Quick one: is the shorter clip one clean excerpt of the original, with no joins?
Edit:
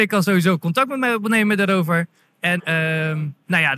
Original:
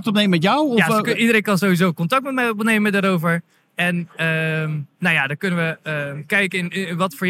no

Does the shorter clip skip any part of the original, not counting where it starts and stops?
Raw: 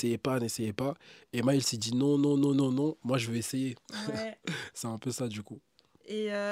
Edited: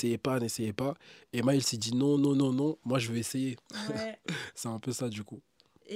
yes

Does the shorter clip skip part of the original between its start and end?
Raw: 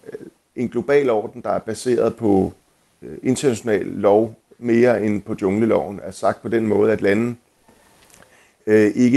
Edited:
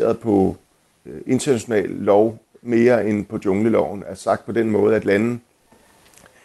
no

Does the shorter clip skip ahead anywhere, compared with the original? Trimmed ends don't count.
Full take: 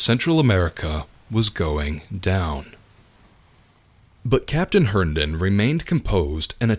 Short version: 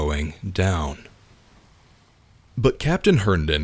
no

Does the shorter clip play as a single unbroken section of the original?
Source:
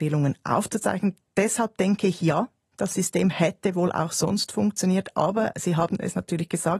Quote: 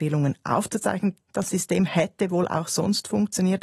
no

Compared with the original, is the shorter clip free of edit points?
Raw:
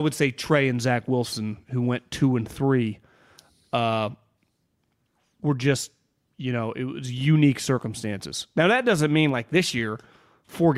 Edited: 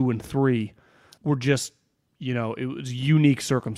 no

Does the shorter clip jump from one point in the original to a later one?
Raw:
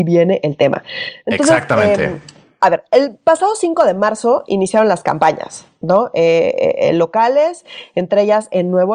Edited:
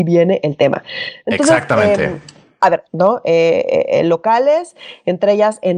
yes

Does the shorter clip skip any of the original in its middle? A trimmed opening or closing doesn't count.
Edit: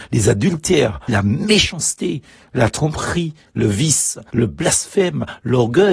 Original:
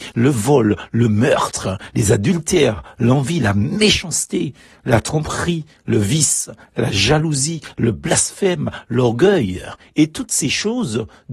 yes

